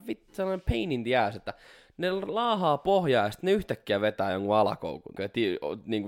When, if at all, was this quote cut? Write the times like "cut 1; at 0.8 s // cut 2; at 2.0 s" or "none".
cut 1; at 5.2 s